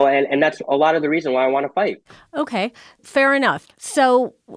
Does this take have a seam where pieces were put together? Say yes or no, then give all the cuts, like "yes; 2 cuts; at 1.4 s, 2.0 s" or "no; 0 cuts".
yes; 1 cut; at 3.6 s